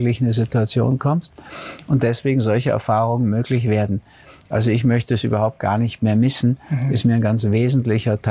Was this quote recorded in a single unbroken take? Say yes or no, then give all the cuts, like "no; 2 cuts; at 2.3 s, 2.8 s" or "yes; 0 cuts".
yes; 0 cuts